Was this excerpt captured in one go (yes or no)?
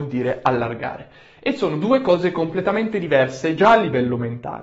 yes